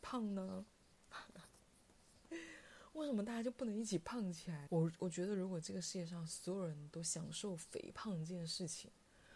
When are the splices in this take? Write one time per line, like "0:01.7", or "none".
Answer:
0:04.7